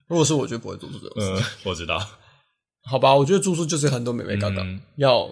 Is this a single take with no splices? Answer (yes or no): yes